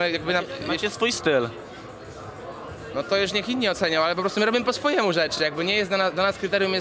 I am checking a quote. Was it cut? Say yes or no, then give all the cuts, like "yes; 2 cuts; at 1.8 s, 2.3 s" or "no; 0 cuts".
no; 0 cuts